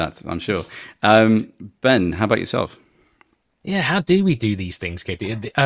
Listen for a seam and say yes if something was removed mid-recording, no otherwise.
no